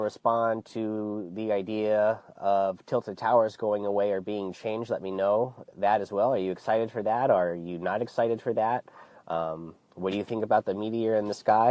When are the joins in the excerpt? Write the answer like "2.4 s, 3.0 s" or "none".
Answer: none